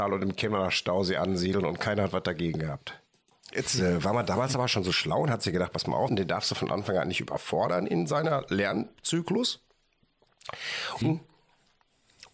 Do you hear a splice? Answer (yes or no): yes